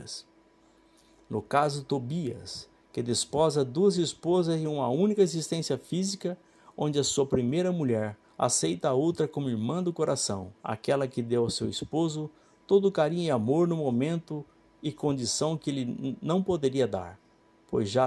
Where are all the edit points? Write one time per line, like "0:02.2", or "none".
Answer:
0:08.2
0:10.6